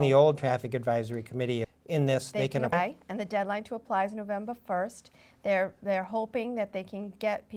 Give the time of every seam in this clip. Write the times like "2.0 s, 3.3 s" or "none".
1.6 s, 2.7 s